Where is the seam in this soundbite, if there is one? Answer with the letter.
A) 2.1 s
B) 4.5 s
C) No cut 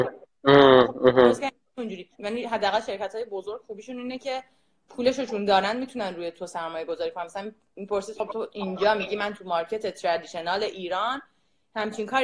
A